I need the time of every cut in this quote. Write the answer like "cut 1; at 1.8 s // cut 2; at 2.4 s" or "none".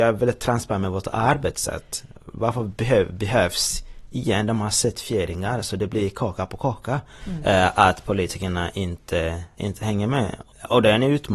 cut 1; at 7.2 s